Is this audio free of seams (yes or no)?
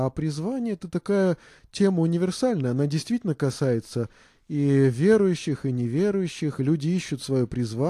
yes